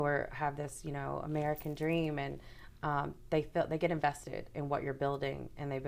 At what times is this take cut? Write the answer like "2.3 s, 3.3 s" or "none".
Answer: none